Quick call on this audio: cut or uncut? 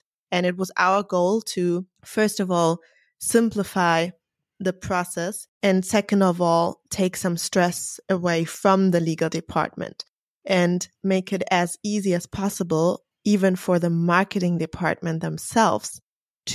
cut